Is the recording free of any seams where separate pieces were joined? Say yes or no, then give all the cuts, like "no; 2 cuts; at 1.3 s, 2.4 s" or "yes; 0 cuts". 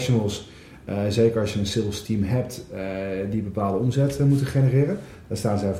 yes; 0 cuts